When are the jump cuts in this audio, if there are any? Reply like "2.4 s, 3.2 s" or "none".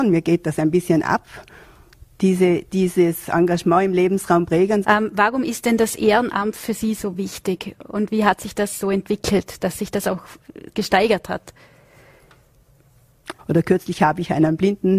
4.8 s, 13.4 s